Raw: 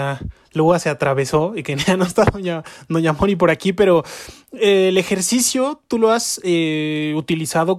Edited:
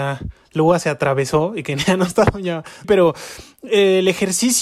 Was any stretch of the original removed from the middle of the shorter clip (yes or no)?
yes